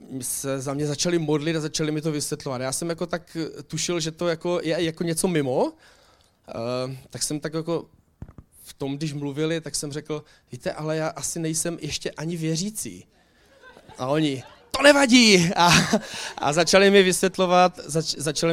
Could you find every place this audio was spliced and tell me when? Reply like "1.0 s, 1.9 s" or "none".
none